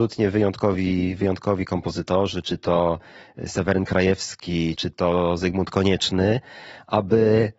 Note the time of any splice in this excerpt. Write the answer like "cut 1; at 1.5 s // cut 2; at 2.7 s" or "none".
cut 1; at 4.8 s